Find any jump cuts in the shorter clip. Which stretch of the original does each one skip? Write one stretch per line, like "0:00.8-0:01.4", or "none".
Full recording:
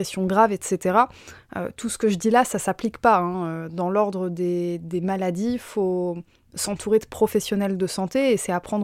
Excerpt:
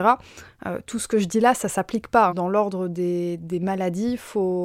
0:03.2-0:03.7